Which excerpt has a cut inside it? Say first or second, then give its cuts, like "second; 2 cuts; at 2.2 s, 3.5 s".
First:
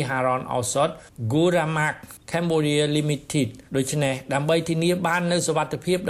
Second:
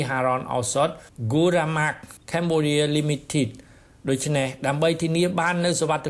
first; 1 cut; at 3.7 s